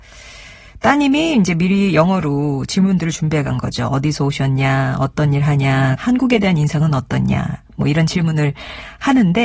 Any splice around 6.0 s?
yes; 1 cut; at 6.0 s

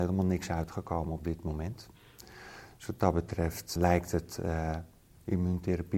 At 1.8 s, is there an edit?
no; 1 cut; at 3.8 s

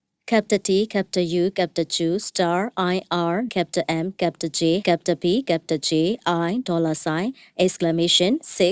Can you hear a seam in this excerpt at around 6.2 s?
no; 2 cuts; at 3.5 s, 4.8 s

